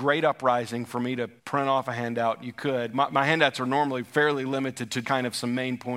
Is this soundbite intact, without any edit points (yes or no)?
no